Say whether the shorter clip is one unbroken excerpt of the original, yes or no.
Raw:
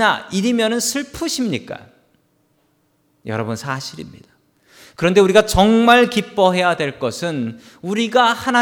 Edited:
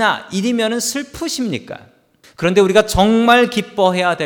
no